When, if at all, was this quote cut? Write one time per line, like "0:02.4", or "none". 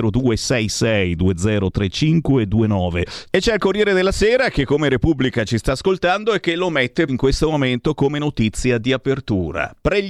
0:03.2
0:07.1